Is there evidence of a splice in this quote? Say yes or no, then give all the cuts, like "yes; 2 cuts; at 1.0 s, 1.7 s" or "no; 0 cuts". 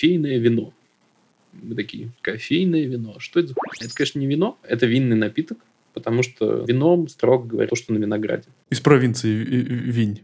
yes; 3 cuts; at 2.2 s, 6.6 s, 7.7 s